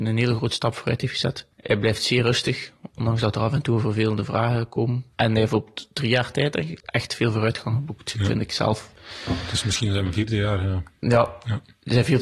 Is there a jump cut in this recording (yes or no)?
yes